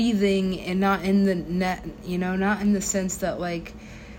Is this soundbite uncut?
yes; 0 cuts

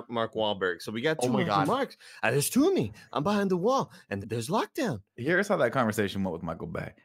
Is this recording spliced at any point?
yes; 1 cut; at 4.2 s

